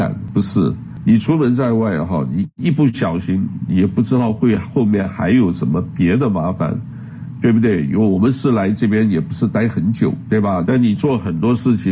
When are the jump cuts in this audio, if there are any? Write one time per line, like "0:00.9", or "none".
0:10.6